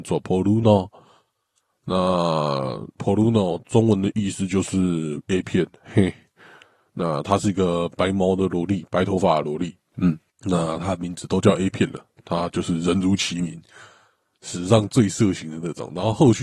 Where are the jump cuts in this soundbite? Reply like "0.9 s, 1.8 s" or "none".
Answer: none